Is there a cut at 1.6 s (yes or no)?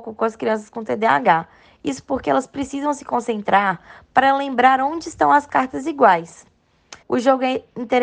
no